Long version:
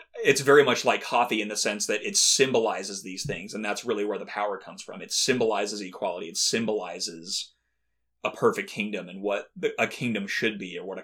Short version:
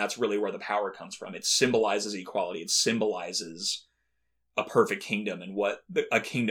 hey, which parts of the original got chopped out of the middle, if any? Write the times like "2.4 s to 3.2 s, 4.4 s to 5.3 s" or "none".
none